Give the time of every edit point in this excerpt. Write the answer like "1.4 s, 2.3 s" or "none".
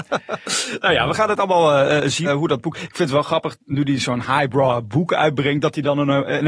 2.2 s